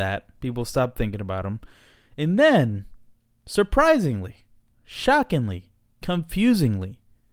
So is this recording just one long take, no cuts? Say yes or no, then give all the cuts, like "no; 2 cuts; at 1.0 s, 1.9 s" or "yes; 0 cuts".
yes; 0 cuts